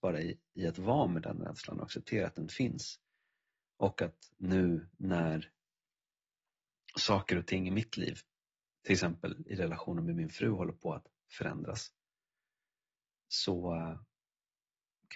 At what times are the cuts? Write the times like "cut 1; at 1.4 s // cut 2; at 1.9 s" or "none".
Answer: none